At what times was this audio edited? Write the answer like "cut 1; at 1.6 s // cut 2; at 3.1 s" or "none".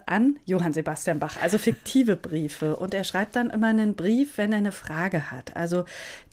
none